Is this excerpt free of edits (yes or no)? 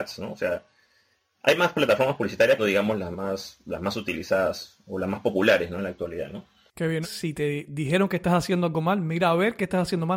no